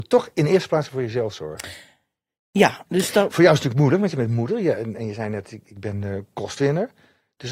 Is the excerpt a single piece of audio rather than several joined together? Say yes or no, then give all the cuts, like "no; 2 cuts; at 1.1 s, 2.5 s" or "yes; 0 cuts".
no; 1 cut; at 4.9 s